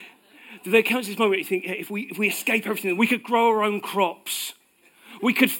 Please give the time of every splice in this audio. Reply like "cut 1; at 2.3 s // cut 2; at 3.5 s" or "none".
cut 1; at 3.0 s